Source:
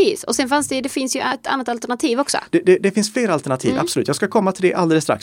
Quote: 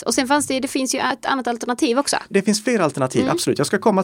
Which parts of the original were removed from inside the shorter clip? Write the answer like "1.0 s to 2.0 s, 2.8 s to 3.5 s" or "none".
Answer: 2.5 s to 2.8 s